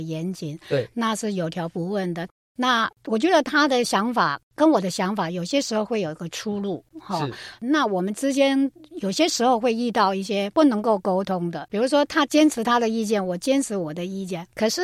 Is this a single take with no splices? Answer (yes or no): yes